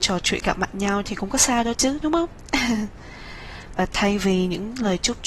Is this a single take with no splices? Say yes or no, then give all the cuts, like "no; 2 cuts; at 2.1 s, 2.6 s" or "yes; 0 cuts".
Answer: yes; 0 cuts